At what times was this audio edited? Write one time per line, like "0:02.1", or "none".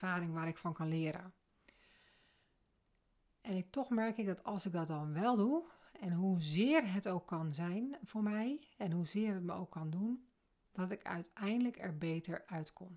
none